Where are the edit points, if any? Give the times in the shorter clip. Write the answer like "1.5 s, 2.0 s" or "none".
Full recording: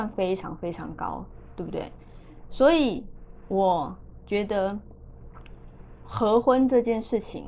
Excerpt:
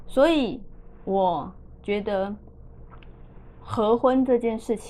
none